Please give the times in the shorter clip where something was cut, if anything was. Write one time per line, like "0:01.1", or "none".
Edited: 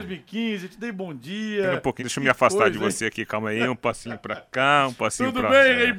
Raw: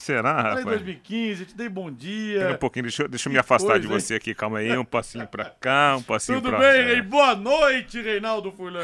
0:02.0